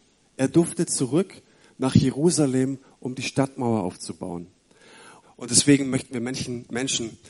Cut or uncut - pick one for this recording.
cut